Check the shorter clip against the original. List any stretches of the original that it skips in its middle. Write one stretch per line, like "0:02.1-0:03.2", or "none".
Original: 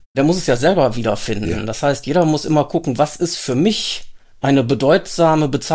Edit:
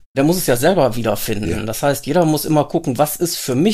none